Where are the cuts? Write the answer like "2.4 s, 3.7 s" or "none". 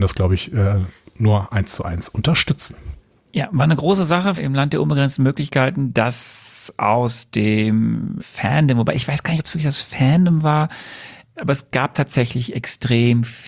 4.4 s, 8.2 s